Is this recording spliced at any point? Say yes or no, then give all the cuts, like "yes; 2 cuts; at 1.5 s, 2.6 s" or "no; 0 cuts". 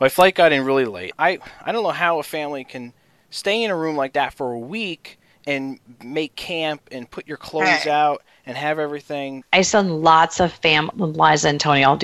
yes; 3 cuts; at 1.1 s, 9.4 s, 10.9 s